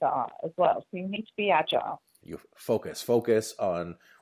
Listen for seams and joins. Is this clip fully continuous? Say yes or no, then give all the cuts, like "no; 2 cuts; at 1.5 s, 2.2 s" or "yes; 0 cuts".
no; 1 cut; at 2.2 s